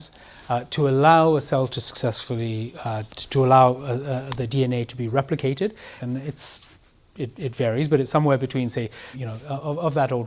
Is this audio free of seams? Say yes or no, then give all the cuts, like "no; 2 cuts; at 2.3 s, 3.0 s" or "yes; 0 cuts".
no; 2 cuts; at 6.0 s, 9.1 s